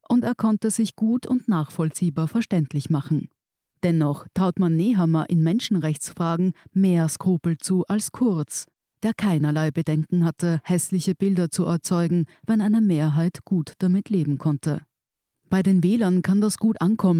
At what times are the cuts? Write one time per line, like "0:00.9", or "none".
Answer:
0:03.7
0:15.3